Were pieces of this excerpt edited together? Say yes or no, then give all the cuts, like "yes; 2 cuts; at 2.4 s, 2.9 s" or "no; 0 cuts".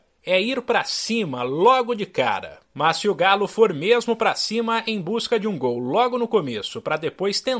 yes; 1 cut; at 2.6 s